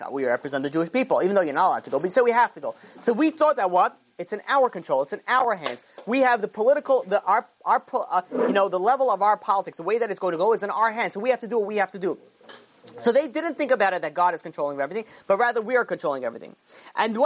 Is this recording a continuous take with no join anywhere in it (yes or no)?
yes